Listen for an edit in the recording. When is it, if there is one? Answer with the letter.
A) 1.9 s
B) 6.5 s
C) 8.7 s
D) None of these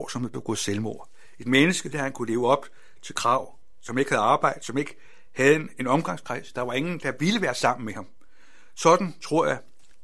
A